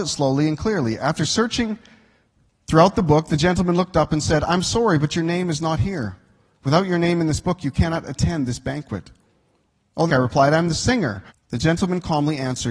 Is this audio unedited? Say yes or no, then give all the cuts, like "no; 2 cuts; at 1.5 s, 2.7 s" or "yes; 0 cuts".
no; 2 cuts; at 10.1 s, 11.3 s